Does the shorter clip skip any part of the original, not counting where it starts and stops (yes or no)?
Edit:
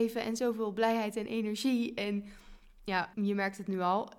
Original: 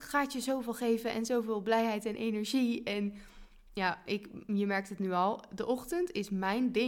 yes